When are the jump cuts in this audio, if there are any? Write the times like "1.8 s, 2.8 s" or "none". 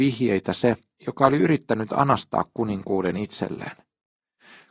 1.0 s